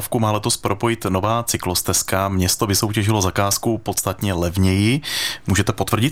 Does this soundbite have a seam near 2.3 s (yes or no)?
no